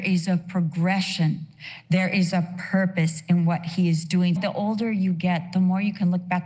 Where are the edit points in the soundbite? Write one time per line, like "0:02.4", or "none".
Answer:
0:04.4